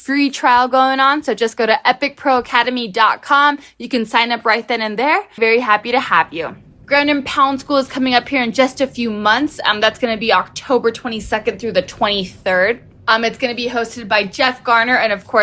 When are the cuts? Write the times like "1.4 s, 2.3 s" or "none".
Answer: 5.4 s

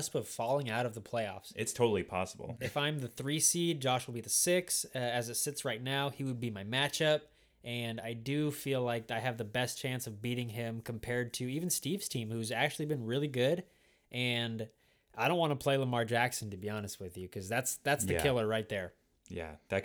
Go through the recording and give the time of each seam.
2.6 s

